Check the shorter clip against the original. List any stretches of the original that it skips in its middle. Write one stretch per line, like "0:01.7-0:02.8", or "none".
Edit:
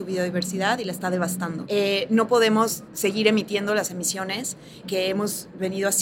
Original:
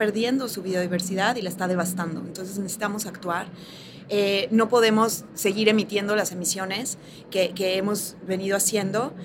0:02.2-0:04.0
0:07.2-0:07.5